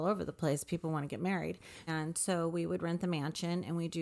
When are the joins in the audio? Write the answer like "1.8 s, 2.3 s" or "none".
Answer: 1.9 s

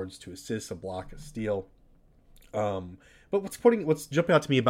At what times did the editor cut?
none

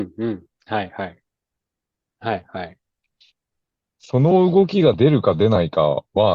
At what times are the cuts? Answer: 2.0 s

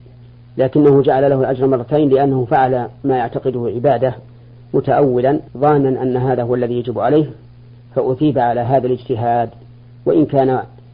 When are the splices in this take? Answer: 5.5 s

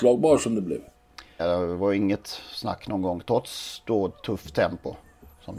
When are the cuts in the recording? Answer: 1.4 s

